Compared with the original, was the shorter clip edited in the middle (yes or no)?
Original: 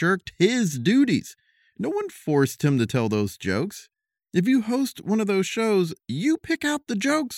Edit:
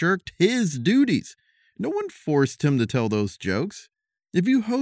no